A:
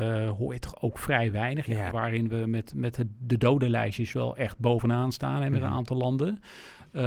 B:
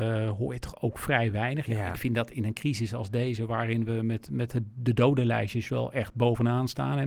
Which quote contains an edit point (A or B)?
A